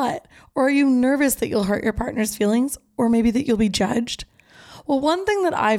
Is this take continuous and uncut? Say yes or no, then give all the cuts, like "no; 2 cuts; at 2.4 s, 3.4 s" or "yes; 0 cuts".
yes; 0 cuts